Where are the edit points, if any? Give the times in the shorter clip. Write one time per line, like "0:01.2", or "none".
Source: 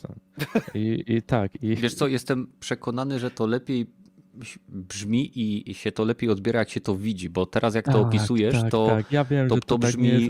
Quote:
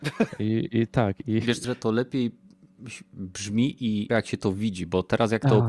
0:01.6
0:04.1